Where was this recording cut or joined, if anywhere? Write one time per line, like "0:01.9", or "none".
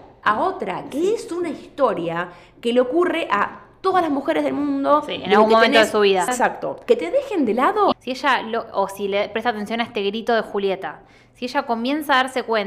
0:06.3
0:07.9